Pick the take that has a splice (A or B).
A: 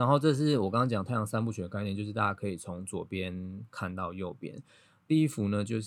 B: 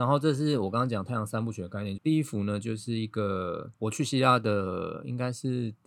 B